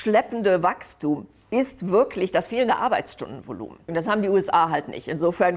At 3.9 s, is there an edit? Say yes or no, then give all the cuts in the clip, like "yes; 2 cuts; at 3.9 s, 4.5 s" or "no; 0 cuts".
yes; 1 cut; at 3.9 s